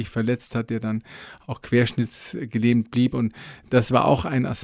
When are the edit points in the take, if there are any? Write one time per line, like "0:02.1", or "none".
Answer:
none